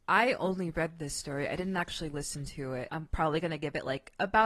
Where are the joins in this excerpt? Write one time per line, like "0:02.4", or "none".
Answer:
0:02.9